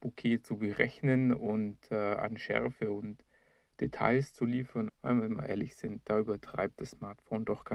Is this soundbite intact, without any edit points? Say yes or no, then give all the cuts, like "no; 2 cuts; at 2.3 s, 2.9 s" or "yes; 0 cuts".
no; 1 cut; at 4.9 s